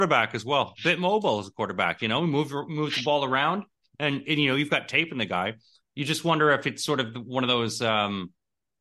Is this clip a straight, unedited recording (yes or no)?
yes